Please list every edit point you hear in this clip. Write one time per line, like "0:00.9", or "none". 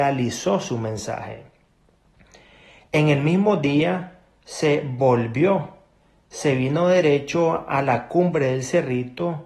none